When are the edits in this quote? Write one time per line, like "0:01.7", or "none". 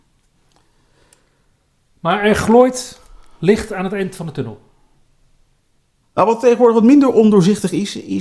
0:06.0